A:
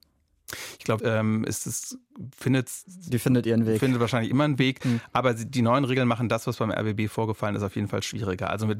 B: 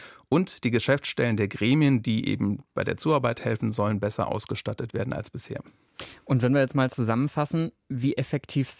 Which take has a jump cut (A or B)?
A